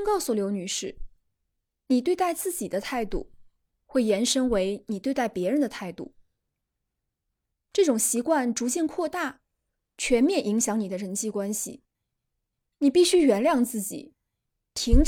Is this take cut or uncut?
uncut